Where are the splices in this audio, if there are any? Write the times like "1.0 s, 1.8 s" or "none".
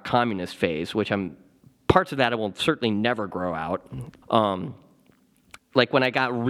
4.2 s, 5.6 s